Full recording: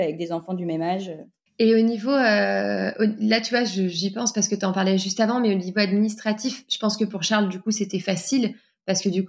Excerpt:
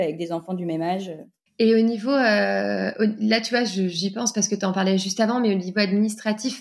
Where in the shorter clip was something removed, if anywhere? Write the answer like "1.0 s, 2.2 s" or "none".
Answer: none